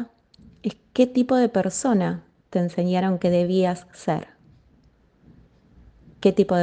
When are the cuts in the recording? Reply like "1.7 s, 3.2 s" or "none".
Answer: none